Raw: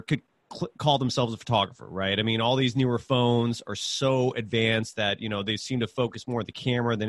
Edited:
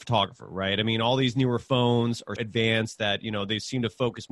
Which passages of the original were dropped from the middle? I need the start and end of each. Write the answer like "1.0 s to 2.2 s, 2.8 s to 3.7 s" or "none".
3.8 s to 4.3 s